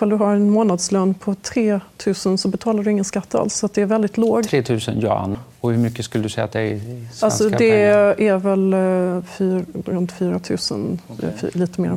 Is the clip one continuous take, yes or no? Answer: no